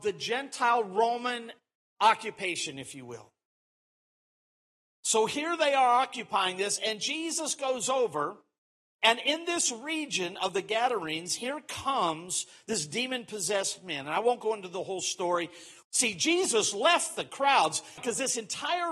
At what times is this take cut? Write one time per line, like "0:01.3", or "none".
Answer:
0:15.8
0:18.0